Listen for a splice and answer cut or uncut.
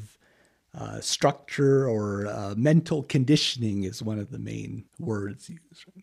cut